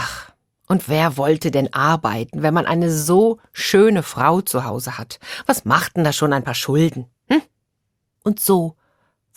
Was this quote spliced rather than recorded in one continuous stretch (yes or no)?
no